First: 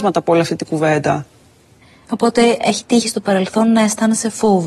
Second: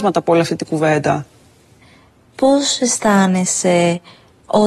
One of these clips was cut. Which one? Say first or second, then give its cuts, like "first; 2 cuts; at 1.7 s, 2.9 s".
first; 1 cut; at 2.0 s